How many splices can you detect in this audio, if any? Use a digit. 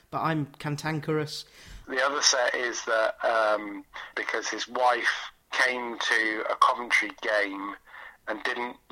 2